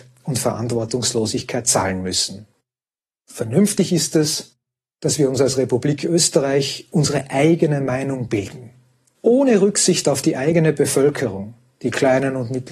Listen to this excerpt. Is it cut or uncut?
cut